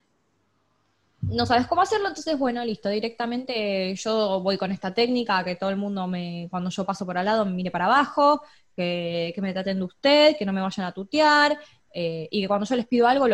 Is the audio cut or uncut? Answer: uncut